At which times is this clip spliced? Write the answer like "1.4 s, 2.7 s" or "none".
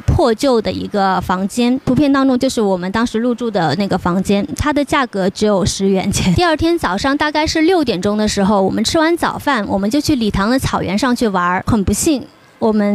none